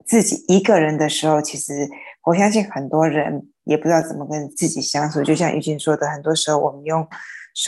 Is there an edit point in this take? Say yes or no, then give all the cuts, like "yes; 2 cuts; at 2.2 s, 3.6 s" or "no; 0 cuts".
yes; 1 cut; at 4.5 s